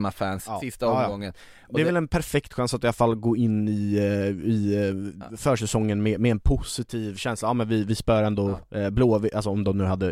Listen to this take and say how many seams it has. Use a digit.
0